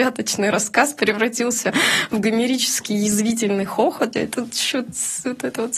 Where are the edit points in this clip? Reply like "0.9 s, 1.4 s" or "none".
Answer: 4.1 s

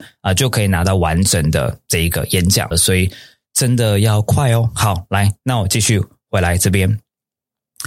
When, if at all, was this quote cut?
2.7 s

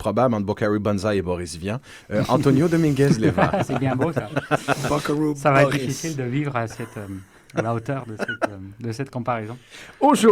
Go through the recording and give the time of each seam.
none

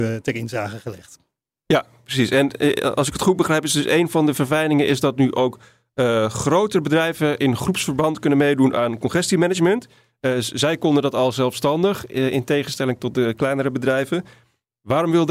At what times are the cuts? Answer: none

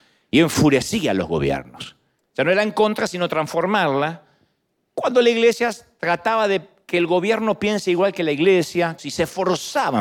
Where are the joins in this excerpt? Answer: 2.2 s, 9.0 s

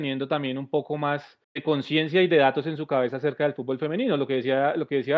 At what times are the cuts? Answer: 1.4 s

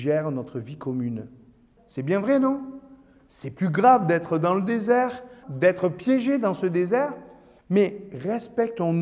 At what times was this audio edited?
1.8 s, 5.4 s, 7.6 s

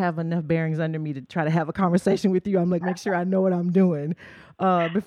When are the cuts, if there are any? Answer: 2.8 s

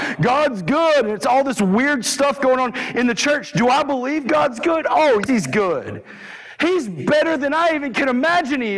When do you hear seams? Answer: 5.3 s

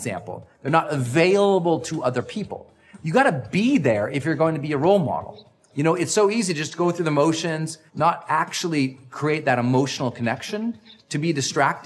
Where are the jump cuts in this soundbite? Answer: 7.9 s

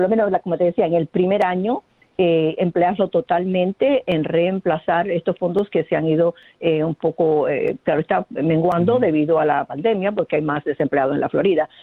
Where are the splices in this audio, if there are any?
none

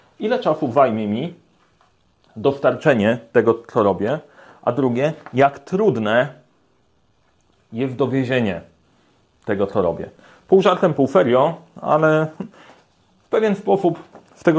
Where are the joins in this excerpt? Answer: none

